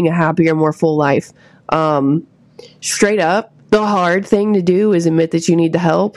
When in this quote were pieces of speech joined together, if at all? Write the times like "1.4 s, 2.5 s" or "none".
3.6 s